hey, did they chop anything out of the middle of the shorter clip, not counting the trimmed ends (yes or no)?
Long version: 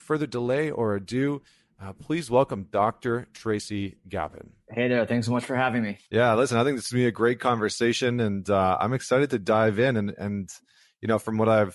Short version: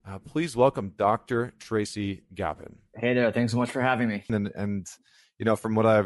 yes